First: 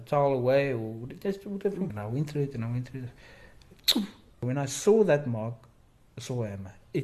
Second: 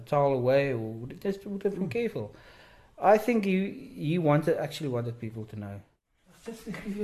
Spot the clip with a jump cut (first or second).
first